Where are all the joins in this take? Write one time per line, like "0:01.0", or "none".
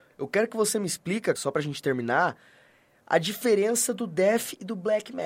0:01.3